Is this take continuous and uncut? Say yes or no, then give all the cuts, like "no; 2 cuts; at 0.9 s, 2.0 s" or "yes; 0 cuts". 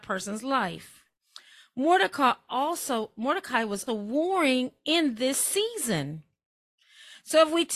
no; 1 cut; at 3.9 s